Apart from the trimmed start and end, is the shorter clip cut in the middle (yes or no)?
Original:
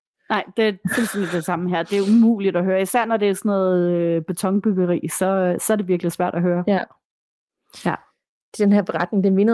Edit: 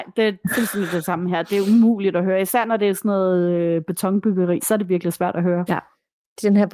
yes